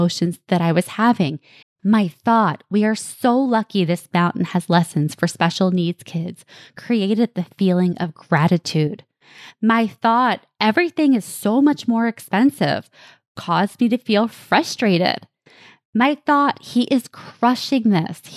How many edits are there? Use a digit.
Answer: 1